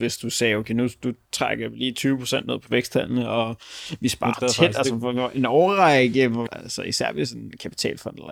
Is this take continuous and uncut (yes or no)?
no